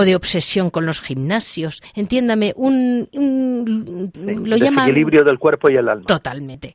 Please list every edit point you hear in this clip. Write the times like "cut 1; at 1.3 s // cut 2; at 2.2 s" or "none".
none